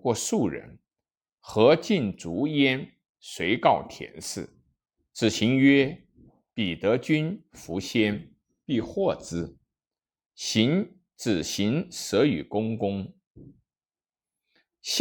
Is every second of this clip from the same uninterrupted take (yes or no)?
yes